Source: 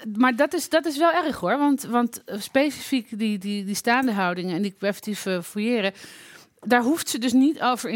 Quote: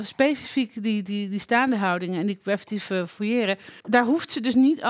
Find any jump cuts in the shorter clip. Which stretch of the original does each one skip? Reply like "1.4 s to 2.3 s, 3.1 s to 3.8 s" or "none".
6.2 s to 6.6 s